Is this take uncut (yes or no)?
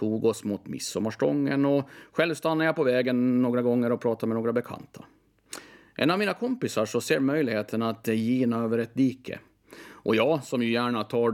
yes